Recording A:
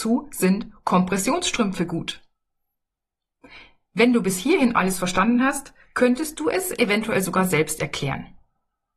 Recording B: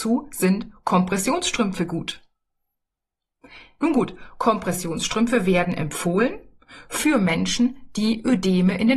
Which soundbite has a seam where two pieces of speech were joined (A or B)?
B